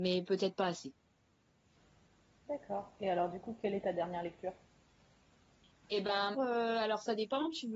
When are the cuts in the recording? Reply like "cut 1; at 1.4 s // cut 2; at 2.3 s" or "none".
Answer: cut 1; at 6.3 s